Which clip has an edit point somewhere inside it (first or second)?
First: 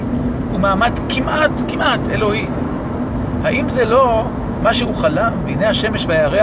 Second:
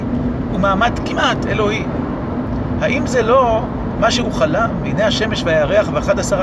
second